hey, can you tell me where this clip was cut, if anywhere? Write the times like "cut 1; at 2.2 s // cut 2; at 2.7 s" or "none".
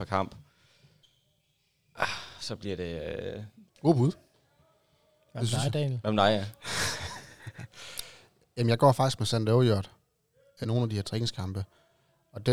cut 1; at 3.7 s // cut 2; at 10.6 s